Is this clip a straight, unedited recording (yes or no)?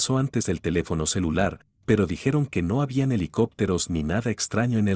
no